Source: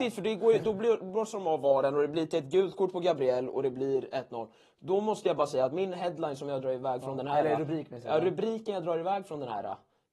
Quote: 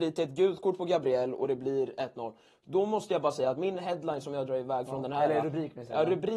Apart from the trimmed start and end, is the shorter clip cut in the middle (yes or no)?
no